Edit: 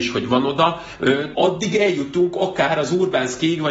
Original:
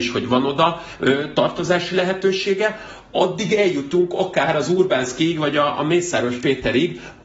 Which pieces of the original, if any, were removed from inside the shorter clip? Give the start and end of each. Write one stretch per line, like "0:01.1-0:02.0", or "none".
0:01.3-0:03.1